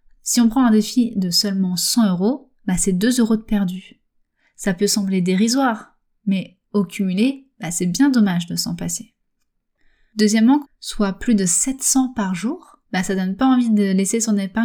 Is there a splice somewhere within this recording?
yes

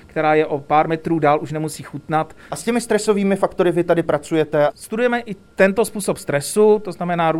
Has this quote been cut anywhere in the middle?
no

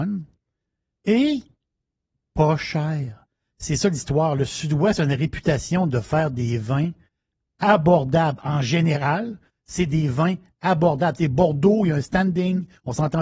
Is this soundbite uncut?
yes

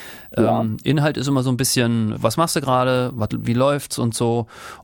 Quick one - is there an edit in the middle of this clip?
yes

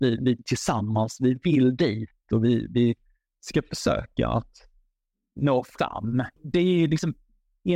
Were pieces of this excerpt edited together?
yes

